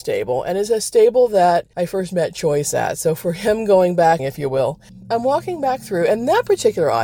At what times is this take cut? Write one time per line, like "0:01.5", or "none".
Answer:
0:04.2